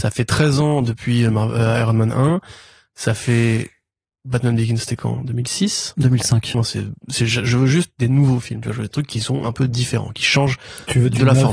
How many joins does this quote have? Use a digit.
1